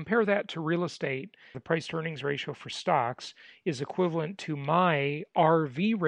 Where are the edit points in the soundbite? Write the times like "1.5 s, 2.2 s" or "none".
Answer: 1.5 s